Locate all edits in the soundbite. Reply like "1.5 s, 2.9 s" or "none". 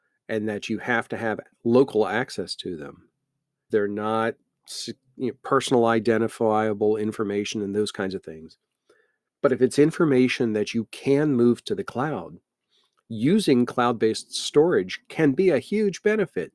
3.7 s